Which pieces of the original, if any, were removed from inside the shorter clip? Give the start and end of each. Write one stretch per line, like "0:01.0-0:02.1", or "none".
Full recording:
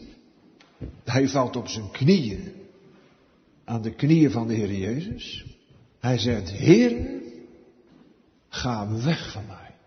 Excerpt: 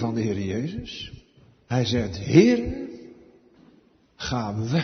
none

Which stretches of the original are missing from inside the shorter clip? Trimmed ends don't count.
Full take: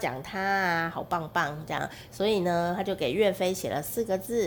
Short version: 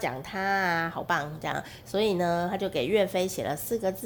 0:01.0-0:01.3

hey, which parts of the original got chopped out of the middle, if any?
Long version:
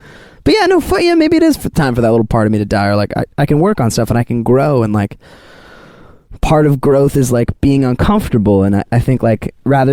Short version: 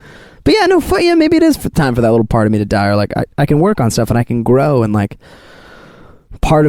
none

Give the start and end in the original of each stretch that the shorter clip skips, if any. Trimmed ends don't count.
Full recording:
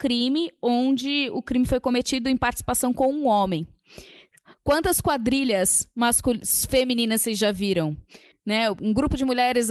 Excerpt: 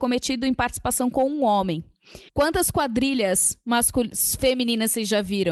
0:04.1-0:04.6

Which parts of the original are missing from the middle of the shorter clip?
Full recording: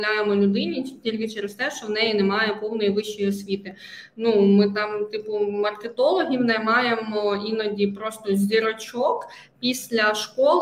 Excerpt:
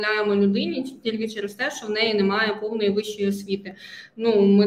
none

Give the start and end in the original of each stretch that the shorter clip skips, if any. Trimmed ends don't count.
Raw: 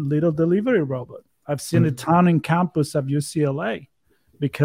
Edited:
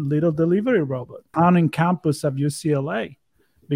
0:01.3-0:02.0

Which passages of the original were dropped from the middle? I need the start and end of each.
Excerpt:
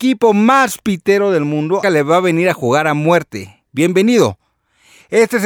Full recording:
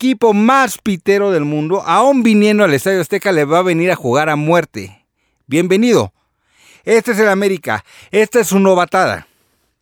0:01.8-0:03.3
0:05.1-0:05.4

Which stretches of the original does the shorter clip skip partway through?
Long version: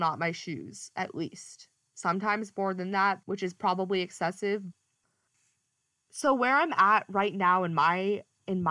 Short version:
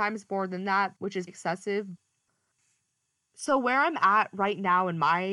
0:03.5-0:04.0

